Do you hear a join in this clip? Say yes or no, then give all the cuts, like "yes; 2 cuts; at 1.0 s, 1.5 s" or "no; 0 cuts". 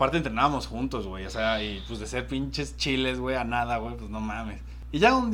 no; 0 cuts